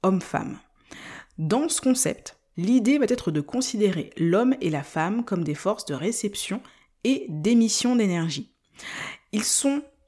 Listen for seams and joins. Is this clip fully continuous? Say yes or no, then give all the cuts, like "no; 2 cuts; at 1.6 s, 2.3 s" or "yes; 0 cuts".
no; 1 cut; at 2.5 s